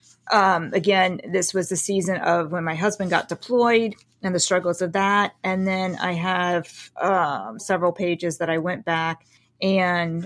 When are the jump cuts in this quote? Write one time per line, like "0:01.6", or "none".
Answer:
0:07.6